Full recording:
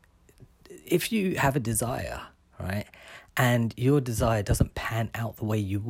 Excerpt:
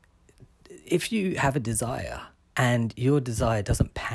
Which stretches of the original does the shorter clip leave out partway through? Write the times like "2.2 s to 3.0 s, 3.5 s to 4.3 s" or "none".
2.5 s to 3.3 s